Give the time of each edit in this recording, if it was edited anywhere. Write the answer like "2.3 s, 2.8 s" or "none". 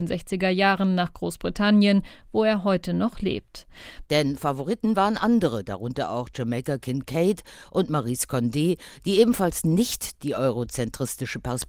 4.0 s